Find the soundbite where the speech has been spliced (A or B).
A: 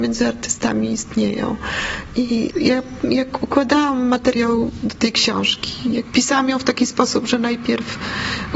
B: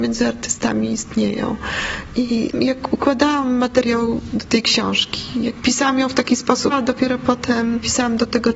B